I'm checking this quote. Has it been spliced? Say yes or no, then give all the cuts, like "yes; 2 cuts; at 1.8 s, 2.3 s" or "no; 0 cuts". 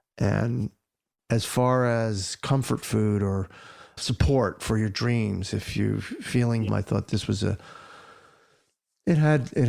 yes; 2 cuts; at 4.0 s, 6.7 s